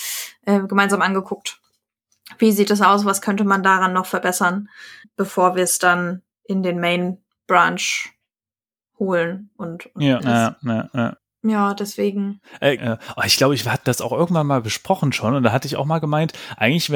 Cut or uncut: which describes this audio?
cut